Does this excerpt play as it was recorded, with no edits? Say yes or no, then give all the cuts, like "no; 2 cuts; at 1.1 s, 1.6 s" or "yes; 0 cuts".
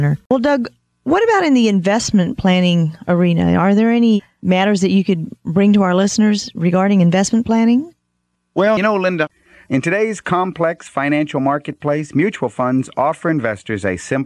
no; 1 cut; at 8.8 s